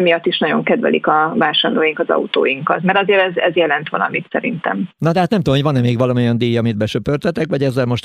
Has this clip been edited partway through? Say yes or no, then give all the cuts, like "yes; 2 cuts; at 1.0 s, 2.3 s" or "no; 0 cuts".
yes; 1 cut; at 4.9 s